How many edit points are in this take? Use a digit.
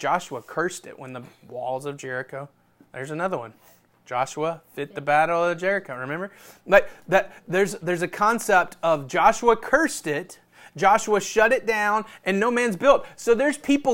0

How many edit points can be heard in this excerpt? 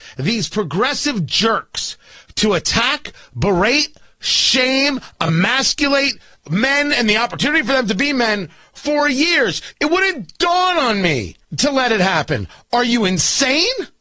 2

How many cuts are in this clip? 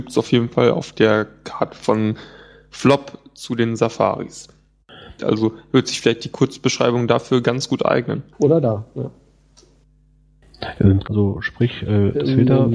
3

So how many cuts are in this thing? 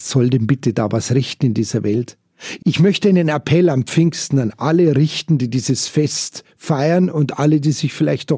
1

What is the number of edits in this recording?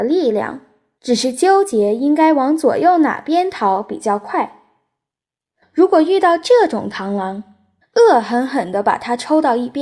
3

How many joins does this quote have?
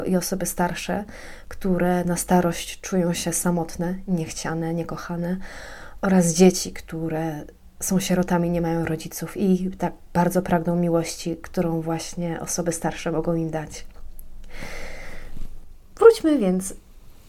0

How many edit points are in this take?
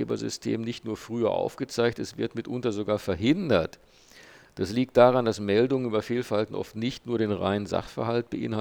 0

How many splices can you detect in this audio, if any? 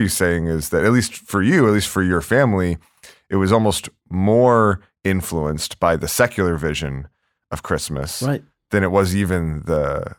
0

